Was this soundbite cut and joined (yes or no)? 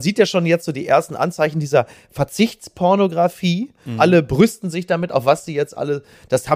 no